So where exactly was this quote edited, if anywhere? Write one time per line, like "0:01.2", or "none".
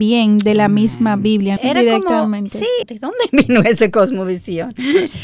0:01.6
0:02.8